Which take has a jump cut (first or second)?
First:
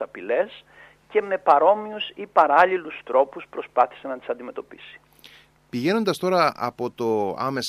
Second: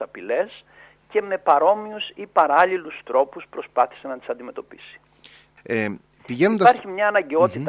second